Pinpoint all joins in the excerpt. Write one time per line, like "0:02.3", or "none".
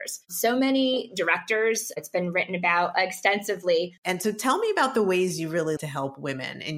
0:04.0
0:05.8